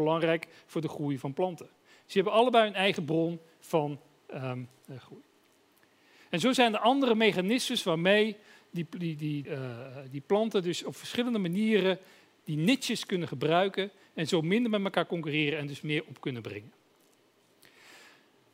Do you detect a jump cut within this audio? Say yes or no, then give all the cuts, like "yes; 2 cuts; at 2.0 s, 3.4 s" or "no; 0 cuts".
yes; 1 cut; at 9.4 s